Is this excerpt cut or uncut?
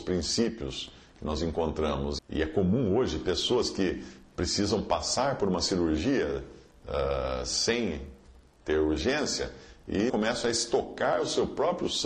cut